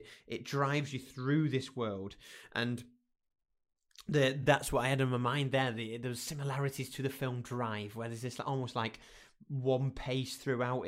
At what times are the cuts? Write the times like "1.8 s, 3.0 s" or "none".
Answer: none